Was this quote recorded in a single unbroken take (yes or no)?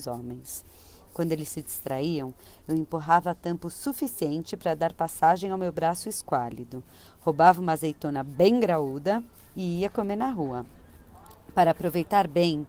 yes